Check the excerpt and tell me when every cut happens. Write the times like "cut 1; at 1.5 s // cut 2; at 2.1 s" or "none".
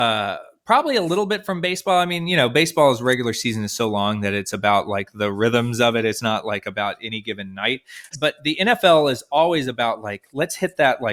cut 1; at 8.1 s